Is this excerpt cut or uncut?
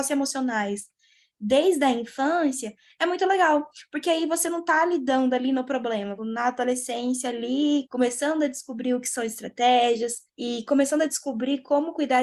cut